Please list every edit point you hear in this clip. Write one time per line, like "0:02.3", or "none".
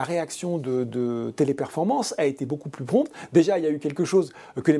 none

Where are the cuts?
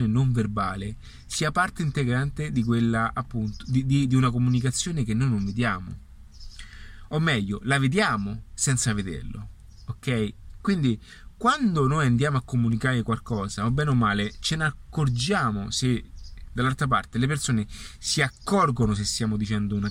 0:10.6

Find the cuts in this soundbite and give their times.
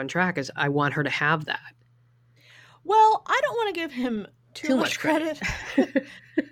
none

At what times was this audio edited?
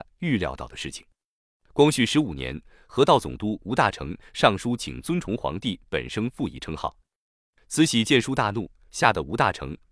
none

